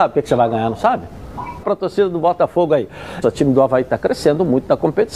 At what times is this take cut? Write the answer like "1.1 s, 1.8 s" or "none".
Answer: 1.6 s, 3.2 s

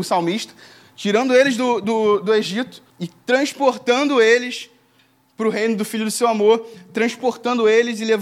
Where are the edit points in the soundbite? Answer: 2.9 s

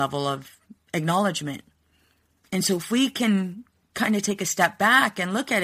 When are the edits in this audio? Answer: 2.4 s

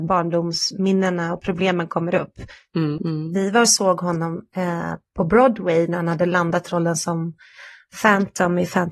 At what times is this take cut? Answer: 3.0 s

